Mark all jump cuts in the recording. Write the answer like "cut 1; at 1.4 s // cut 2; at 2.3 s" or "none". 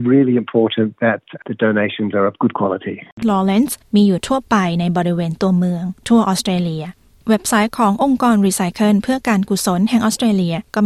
cut 1; at 3.2 s